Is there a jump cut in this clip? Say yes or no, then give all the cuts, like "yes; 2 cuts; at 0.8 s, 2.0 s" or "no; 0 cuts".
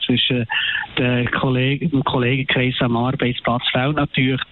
no; 0 cuts